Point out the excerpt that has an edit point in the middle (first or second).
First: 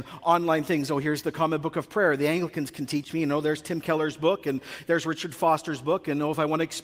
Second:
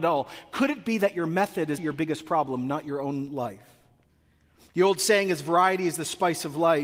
second